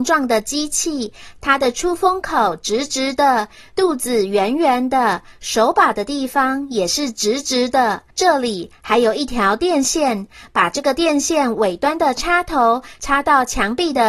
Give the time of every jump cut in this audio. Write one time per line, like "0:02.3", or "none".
0:08.1